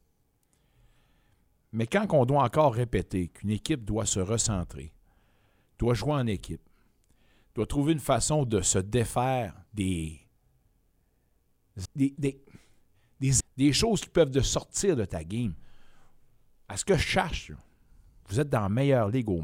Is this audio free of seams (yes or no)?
no